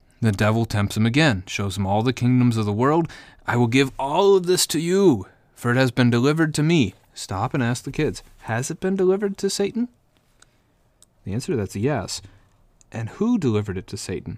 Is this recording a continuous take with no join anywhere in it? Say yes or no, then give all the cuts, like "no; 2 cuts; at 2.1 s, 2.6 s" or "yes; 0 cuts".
yes; 0 cuts